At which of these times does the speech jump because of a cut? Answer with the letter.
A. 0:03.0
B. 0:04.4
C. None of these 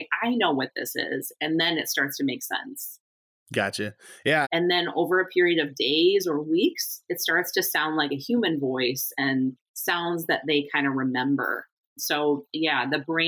B